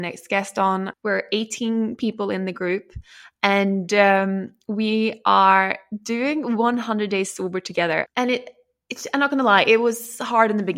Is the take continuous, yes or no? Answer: no